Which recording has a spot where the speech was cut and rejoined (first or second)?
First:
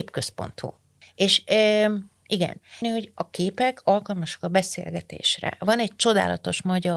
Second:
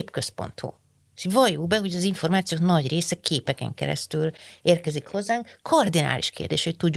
first